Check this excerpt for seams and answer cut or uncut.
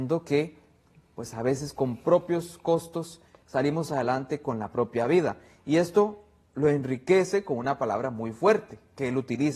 uncut